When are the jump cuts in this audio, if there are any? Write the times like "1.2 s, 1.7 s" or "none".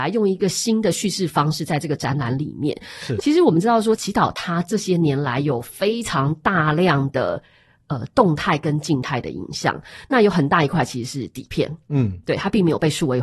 3.2 s

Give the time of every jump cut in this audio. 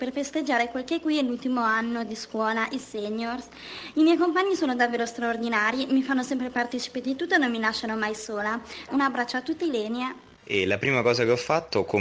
8.9 s, 10.4 s

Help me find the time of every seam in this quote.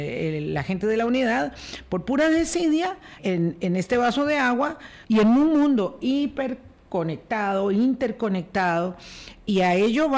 3.2 s, 5.0 s

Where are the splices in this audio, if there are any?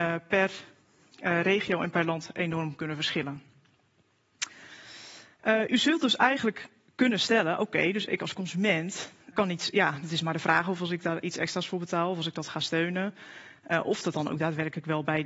9.3 s

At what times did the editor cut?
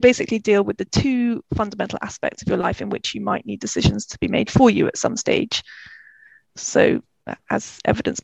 6.5 s

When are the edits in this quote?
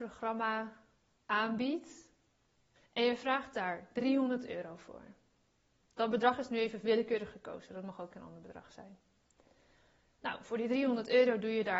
2.8 s

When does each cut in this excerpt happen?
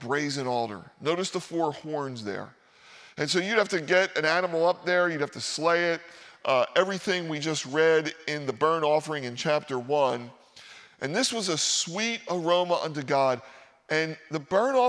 none

